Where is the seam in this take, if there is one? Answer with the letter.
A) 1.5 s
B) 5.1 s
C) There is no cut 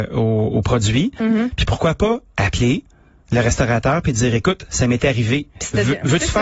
C